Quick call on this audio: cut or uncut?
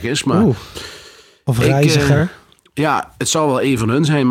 uncut